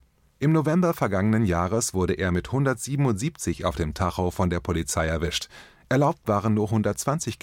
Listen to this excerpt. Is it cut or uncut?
uncut